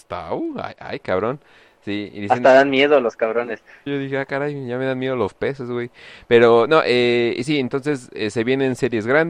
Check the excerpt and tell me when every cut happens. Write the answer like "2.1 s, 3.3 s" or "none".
3.9 s